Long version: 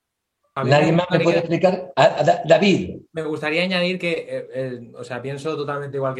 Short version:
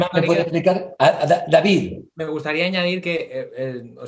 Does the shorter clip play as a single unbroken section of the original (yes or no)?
yes